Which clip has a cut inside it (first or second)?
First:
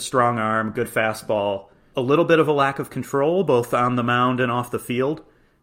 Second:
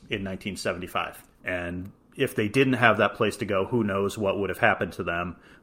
second